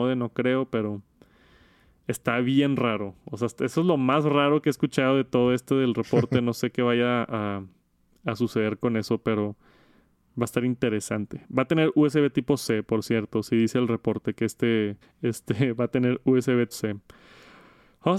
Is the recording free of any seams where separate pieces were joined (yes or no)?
no